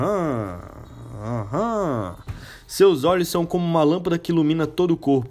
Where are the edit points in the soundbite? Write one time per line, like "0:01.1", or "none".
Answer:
none